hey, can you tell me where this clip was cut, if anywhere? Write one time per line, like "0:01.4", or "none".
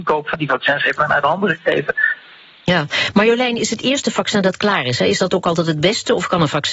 none